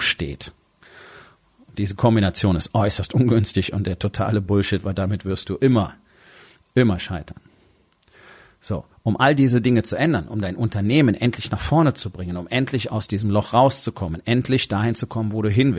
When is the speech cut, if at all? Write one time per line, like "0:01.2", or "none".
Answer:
none

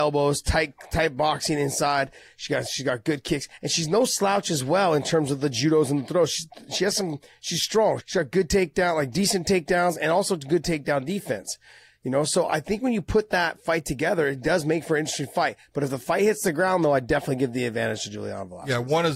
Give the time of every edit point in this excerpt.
0:08.0

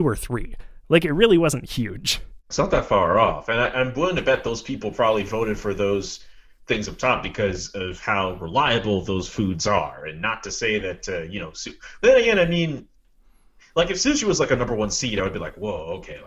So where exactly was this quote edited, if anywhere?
none

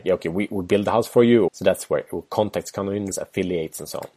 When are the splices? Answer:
0:01.5
0:03.1

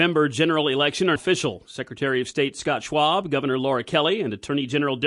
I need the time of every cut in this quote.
0:01.2

